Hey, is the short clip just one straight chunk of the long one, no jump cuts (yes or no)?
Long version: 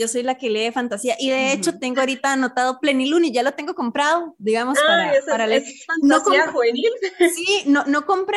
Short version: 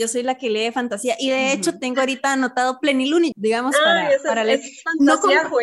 no